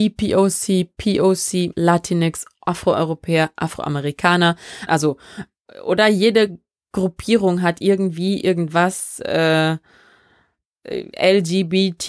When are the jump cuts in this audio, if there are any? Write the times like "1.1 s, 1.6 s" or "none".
1.7 s, 4.9 s